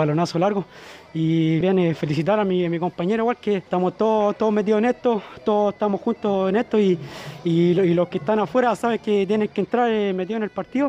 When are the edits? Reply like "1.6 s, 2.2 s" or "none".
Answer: 1.6 s, 3.7 s